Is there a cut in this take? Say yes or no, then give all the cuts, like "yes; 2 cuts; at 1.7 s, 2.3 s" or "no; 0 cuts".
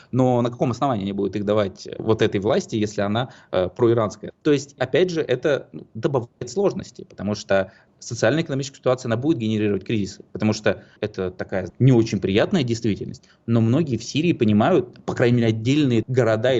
no; 0 cuts